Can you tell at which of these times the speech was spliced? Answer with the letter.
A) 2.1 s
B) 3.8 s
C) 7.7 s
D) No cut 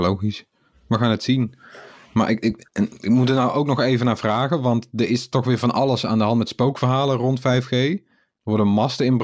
D